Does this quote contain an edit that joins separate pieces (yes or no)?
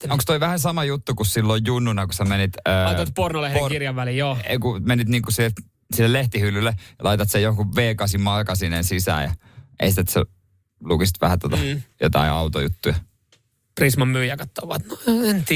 no